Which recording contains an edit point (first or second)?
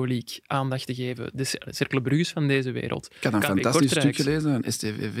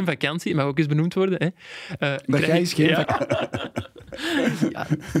second